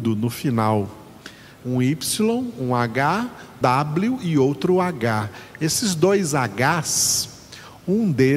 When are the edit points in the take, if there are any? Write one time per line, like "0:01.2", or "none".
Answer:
0:01.6
0:03.6